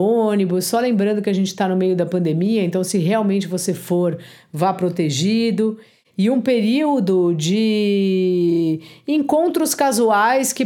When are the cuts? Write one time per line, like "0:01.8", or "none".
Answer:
none